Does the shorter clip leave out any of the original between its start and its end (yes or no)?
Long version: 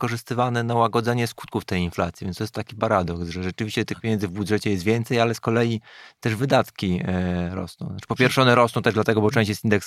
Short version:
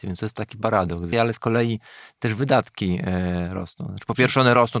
yes